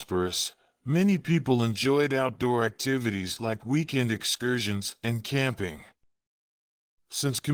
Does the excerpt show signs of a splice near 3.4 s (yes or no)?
no